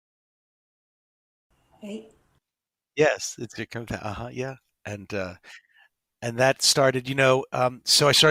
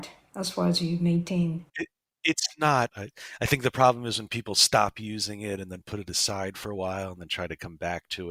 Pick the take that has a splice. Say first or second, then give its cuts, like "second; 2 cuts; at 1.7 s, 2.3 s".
second; 2 cuts; at 1.7 s, 2.9 s